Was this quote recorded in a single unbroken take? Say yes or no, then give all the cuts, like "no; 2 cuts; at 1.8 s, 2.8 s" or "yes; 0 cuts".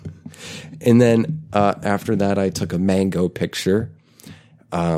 yes; 0 cuts